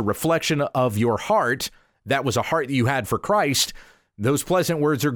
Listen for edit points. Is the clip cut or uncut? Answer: uncut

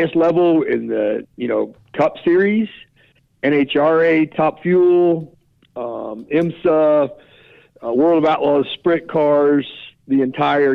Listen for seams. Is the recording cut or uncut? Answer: uncut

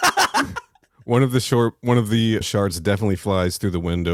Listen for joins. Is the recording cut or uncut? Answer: cut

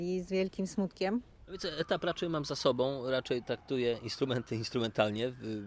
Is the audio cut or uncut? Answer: uncut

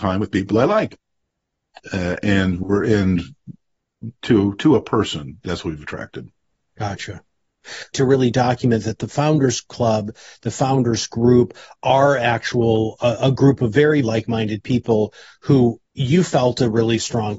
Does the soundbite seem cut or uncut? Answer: cut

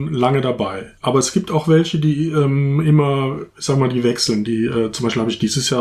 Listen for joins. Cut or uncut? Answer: cut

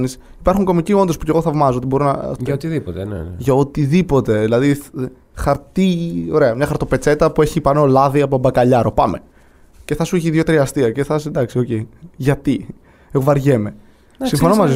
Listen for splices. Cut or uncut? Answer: cut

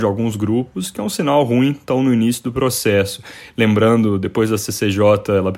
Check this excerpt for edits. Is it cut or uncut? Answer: uncut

